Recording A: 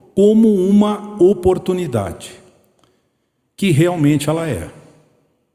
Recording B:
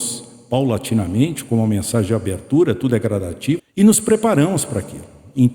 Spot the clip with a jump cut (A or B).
B